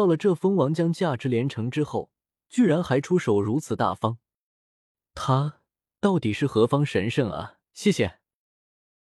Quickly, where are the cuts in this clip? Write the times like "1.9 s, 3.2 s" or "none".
7.7 s